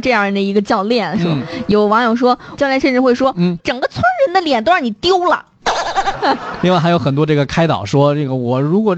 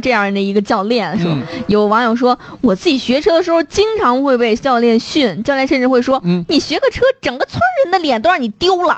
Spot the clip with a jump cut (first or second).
first